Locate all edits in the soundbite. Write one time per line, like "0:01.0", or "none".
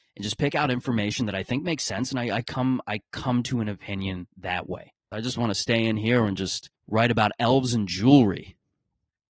0:05.1
0:06.7